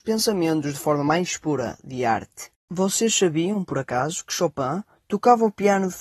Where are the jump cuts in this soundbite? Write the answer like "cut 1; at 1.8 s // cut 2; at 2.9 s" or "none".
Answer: none